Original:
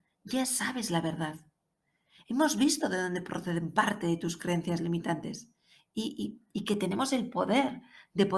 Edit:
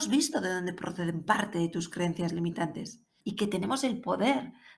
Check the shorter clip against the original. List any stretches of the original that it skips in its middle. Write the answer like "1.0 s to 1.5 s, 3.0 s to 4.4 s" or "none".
5.7 s to 6.5 s